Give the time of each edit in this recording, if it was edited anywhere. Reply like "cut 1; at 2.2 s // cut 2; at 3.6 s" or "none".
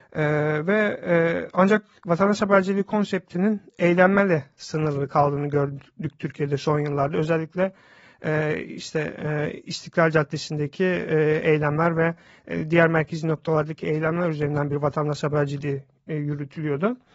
none